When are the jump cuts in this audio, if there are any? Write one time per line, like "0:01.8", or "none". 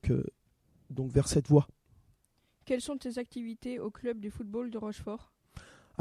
none